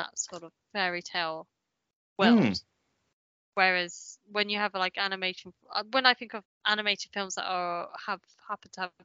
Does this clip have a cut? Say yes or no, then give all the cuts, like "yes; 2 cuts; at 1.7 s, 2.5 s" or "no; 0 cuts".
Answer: yes; 1 cut; at 6.4 s